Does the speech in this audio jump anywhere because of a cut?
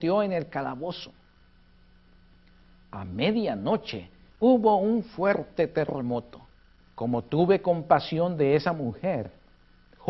yes; 2 cuts; at 4.3 s, 6.8 s

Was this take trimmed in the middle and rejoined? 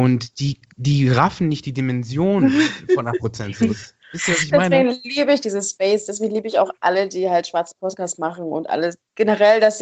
no; 0 cuts

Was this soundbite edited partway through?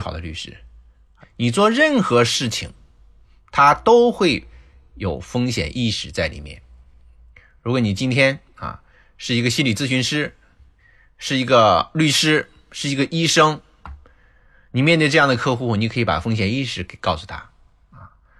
yes; 1 cut; at 1.2 s

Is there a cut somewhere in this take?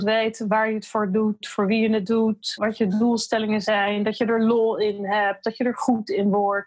yes; 1 cut; at 2.6 s

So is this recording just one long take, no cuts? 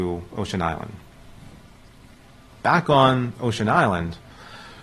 yes; 0 cuts

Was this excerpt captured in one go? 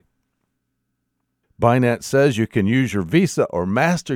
no; 1 cut; at 1.4 s

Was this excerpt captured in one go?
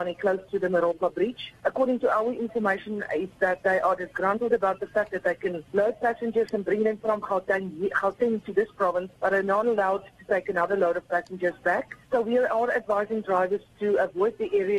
yes; 0 cuts

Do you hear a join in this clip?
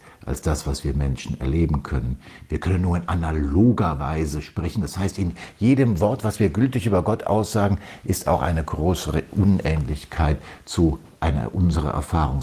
no; 0 cuts

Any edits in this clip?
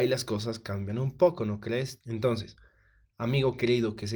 yes; 1 cut; at 2.0 s

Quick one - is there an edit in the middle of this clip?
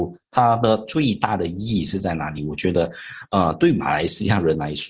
no; 0 cuts

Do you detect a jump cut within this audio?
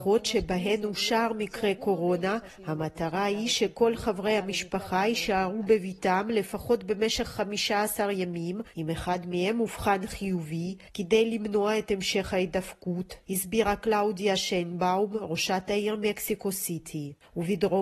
no; 0 cuts

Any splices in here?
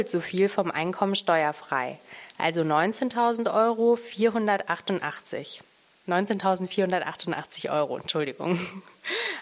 no; 0 cuts

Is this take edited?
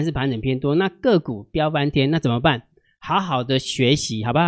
no; 0 cuts

